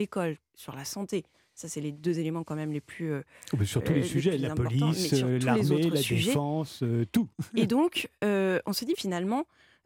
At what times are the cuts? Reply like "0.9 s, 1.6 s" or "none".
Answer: 8.9 s